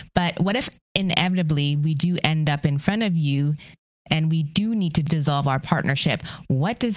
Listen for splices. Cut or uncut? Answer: uncut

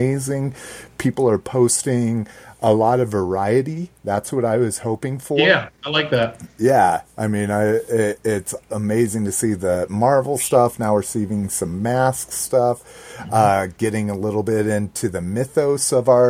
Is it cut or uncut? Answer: uncut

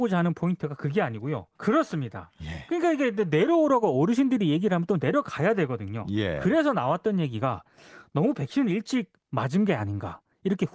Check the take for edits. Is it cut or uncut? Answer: cut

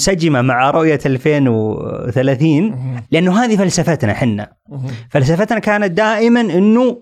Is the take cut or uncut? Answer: cut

